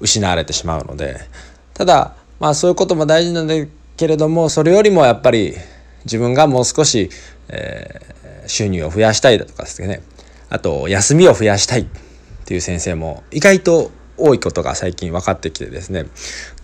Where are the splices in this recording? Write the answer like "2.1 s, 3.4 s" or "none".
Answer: none